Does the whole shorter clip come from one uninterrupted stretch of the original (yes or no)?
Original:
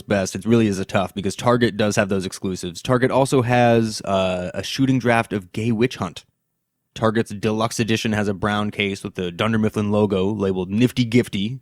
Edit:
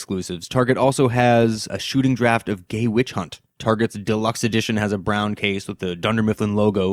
no